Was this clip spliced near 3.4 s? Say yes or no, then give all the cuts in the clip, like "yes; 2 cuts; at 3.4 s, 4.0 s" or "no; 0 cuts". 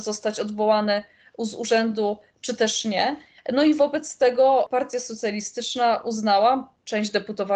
yes; 1 cut; at 3.4 s